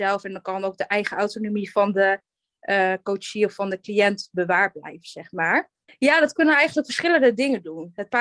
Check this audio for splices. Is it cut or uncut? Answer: cut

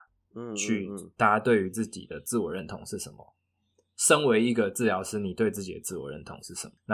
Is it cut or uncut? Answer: cut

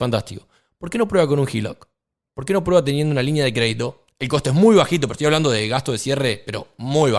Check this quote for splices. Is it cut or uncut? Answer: uncut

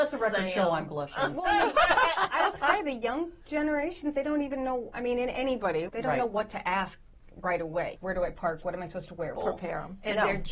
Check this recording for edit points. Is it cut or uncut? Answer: cut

